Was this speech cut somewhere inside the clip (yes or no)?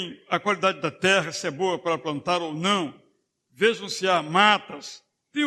no